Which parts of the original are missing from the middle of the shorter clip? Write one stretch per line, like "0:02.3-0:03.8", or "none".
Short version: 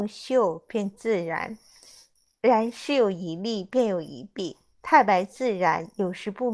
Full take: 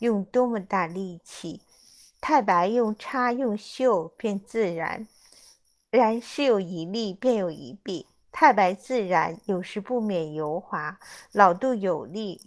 none